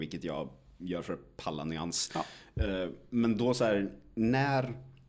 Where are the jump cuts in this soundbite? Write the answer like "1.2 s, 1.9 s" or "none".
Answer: none

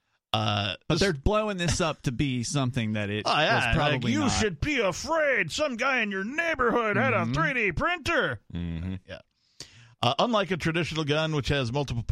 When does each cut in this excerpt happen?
none

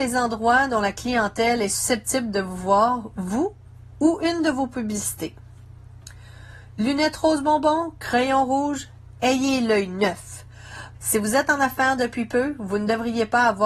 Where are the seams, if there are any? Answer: 10.9 s

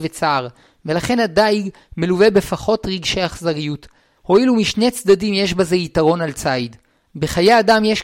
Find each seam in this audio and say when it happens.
4.2 s, 7.1 s

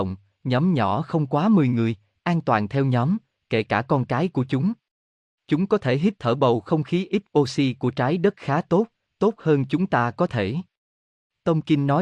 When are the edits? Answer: none

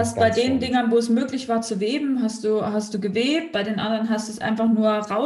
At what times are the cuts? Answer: none

